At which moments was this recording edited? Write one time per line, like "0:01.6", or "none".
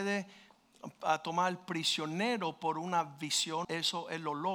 0:03.6